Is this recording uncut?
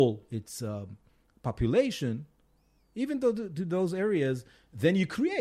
yes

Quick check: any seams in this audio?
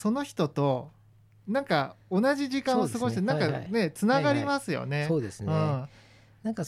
no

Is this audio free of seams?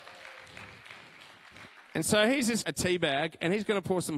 no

